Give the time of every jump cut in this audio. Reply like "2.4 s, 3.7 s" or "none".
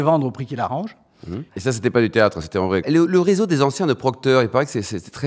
1.5 s, 2.8 s